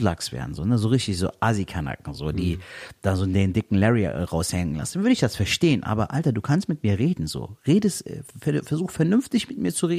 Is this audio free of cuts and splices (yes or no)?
yes